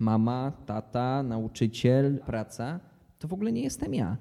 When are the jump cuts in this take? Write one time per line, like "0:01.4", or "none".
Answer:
0:02.2